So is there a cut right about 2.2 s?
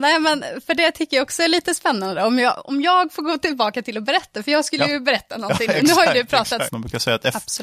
no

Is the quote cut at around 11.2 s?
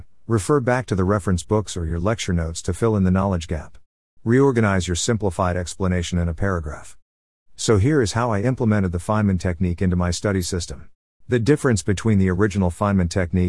yes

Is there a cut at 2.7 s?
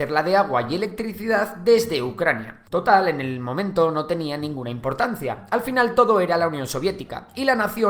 yes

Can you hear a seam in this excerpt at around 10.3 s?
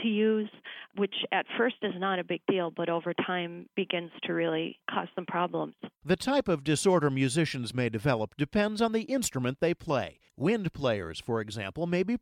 yes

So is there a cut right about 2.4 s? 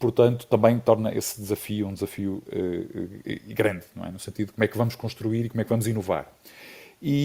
no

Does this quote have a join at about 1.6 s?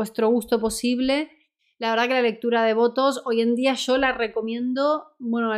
no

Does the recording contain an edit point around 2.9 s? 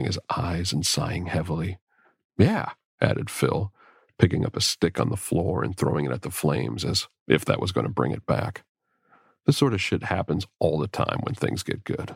no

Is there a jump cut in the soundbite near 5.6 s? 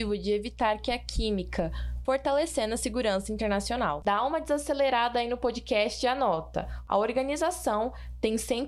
no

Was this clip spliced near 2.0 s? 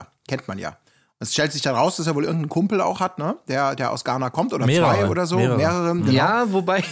no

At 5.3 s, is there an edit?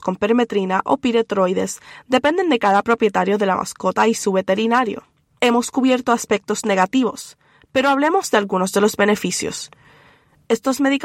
no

